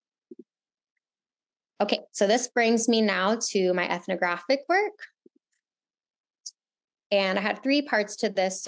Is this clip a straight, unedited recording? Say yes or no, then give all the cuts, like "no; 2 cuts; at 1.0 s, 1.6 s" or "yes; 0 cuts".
no; 1 cut; at 7.0 s